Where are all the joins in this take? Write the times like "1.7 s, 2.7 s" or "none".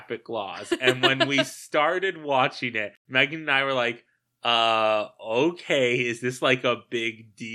none